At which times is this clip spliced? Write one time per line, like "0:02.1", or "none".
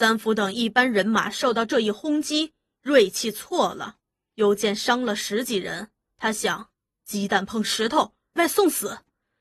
0:08.4